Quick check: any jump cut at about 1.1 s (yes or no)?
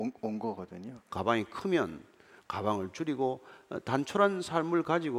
yes